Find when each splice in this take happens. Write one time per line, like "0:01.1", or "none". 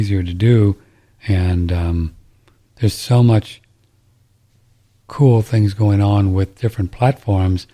none